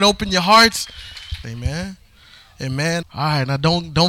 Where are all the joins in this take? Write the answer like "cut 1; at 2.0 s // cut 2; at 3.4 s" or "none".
cut 1; at 1.4 s // cut 2; at 3.0 s